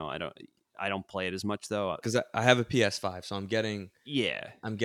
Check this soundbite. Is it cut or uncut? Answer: cut